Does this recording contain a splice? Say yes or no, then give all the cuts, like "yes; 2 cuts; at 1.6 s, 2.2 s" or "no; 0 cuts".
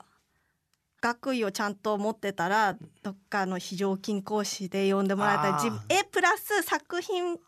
no; 0 cuts